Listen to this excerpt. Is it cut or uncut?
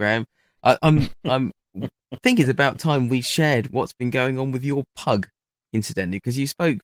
uncut